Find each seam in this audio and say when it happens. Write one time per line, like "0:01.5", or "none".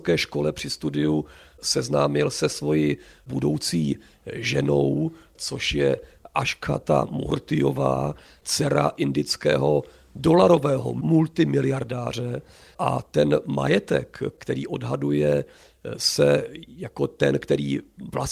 none